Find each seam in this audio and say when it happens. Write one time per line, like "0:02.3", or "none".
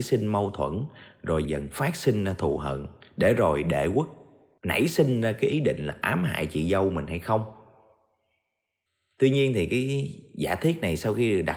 0:01.4